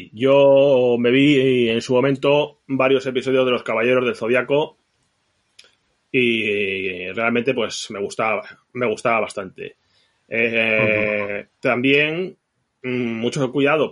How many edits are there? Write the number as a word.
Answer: zero